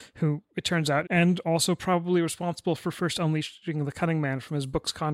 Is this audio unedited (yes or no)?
no